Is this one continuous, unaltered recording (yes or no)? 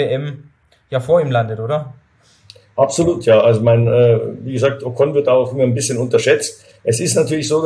yes